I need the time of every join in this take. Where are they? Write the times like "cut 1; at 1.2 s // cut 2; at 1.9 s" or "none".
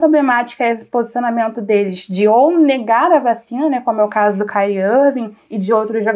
none